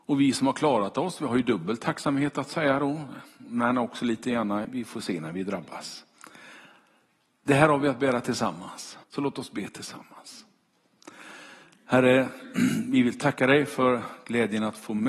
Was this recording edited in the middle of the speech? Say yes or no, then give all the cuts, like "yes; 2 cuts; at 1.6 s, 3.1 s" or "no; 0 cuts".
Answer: yes; 2 cuts; at 4.6 s, 9.0 s